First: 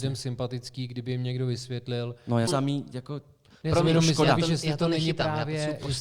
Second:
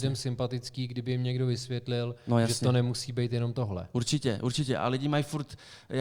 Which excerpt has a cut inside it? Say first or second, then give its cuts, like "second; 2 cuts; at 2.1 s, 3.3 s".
first; 1 cut; at 2.5 s